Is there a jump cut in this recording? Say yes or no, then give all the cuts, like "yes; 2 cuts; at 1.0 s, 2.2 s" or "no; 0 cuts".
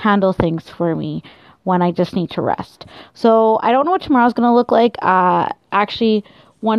no; 0 cuts